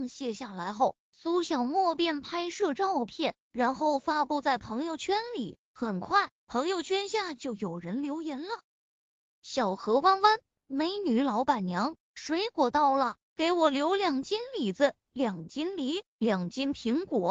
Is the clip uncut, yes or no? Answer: no